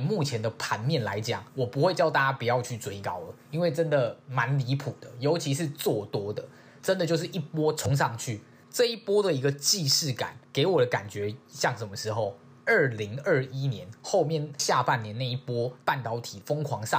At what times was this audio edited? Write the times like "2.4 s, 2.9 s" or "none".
6.8 s